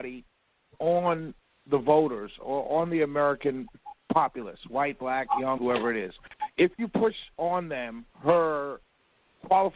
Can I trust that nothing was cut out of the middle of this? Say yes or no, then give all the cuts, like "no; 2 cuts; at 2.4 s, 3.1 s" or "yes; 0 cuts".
no; 2 cuts; at 5.6 s, 8.1 s